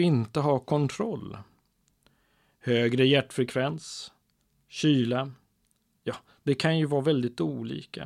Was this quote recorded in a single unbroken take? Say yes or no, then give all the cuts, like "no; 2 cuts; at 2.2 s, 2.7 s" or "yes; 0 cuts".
no; 1 cut; at 4.5 s